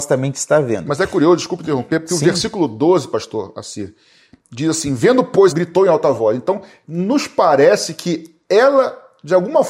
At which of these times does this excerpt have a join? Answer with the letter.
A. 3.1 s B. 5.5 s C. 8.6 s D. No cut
B